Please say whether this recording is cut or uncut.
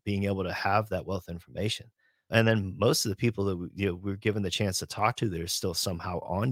cut